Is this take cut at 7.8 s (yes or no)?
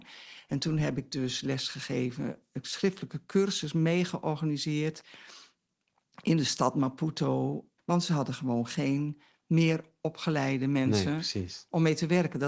yes